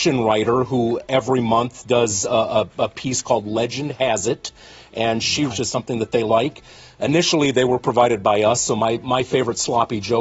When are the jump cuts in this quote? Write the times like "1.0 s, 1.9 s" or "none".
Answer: 5.5 s